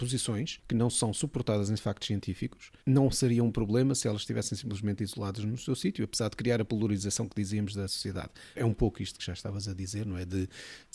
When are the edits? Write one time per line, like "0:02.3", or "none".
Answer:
0:02.8
0:08.5

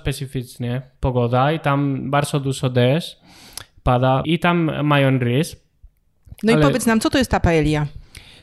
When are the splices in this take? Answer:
0:04.2
0:06.3

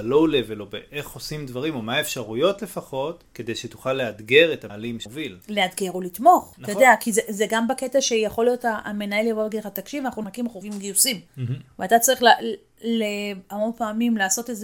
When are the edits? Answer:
none

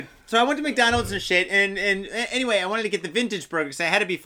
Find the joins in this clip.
none

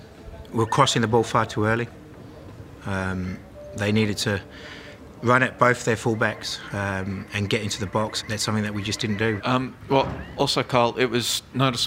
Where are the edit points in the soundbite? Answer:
0:08.2
0:09.4

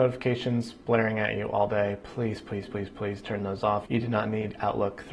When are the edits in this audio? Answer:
0:02.7
0:03.9

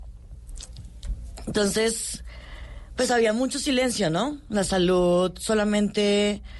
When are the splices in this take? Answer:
none

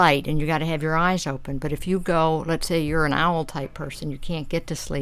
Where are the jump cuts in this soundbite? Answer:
none

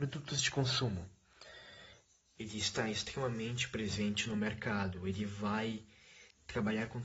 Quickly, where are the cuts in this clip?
0:02.3

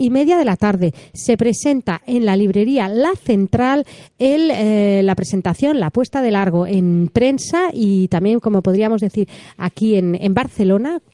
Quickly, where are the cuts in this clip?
none

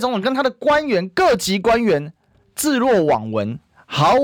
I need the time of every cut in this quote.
none

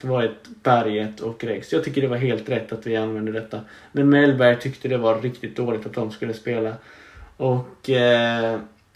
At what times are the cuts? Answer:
none

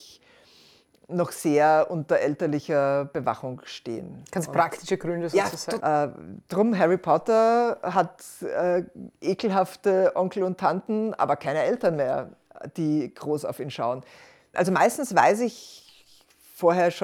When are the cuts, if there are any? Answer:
0:05.8
0:14.5

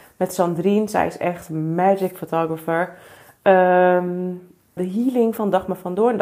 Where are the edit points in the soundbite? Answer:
0:04.8

